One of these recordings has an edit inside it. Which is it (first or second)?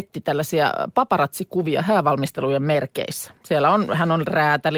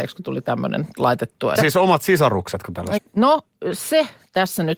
second